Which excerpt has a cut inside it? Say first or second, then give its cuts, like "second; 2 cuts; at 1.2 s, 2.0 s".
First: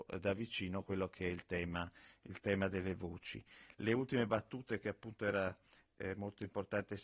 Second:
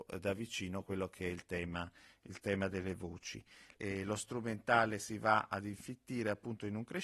second; 1 cut; at 3.8 s